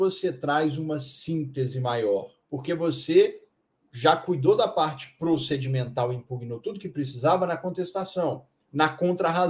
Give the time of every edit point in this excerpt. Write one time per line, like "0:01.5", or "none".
0:02.4

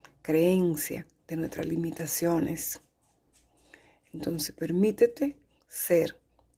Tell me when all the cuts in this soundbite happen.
0:01.2

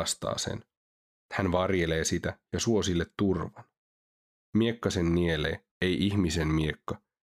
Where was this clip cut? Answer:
0:04.4
0:05.7

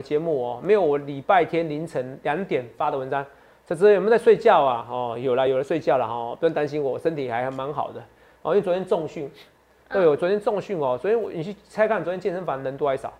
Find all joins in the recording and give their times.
none

